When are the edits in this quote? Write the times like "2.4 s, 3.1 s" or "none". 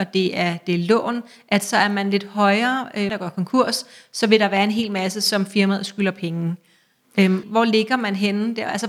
3.1 s, 7.4 s